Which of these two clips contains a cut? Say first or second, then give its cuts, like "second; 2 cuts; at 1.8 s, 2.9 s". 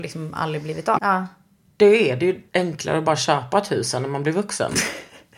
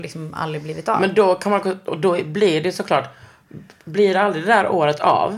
first; 2 cuts; at 1.0 s, 2.5 s